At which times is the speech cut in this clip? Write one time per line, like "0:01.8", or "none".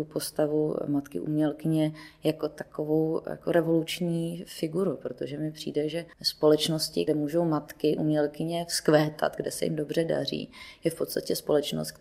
none